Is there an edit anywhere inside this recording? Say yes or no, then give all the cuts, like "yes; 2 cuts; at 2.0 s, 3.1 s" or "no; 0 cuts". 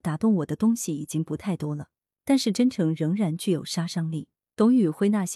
no; 0 cuts